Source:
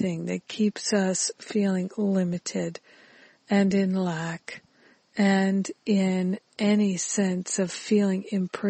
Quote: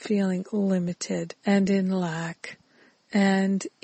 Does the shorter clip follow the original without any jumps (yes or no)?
no